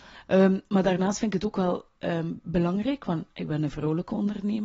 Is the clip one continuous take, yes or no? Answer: yes